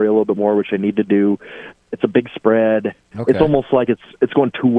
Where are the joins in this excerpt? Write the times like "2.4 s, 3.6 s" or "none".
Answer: 1.7 s, 3.1 s

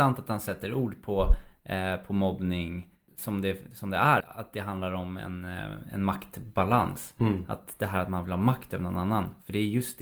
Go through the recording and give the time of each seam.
4.2 s

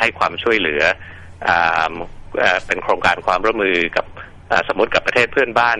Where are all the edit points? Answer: none

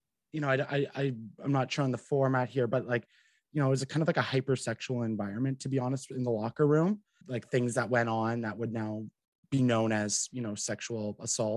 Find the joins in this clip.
none

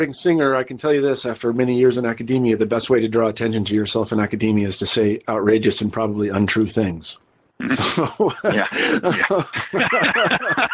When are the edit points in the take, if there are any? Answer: 9.5 s

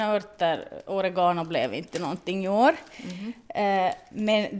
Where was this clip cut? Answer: none

